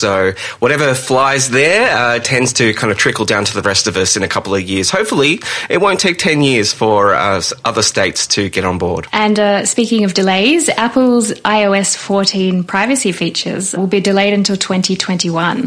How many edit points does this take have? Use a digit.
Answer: 0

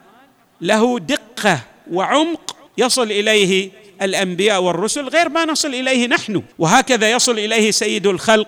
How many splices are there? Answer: 2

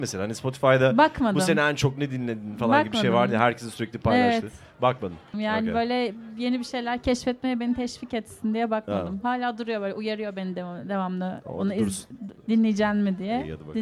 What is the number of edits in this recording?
1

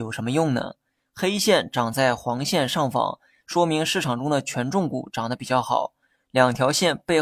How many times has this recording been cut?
2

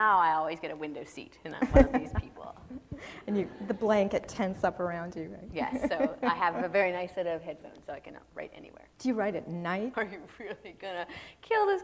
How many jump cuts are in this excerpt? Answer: 2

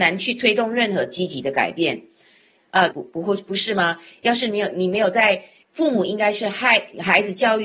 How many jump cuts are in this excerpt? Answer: 2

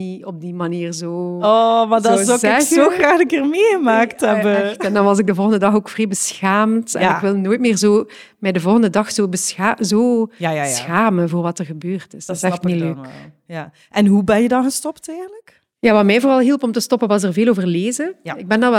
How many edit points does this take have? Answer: 0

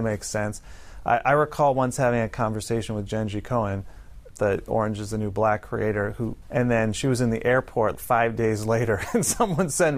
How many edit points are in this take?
3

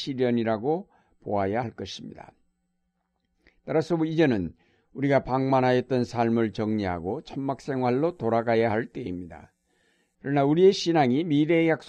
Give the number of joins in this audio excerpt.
1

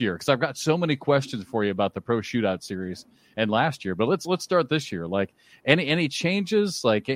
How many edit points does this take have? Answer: 0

